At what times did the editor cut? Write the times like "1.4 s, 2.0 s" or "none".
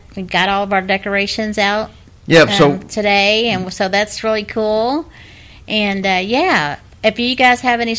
none